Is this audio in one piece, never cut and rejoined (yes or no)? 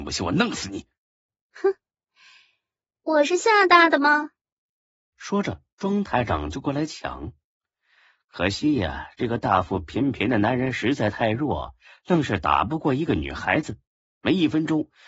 yes